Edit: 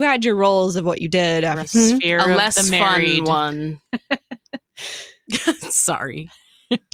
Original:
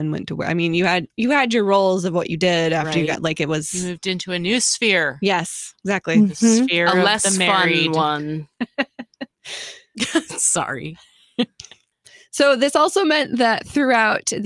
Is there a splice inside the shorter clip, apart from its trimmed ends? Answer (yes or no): yes